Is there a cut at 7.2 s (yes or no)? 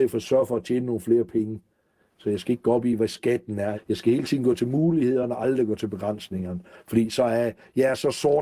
no